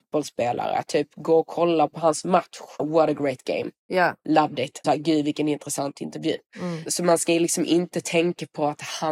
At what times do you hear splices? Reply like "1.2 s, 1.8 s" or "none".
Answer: 2.8 s, 4.8 s, 6.5 s